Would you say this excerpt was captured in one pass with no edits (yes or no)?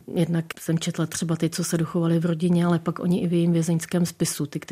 yes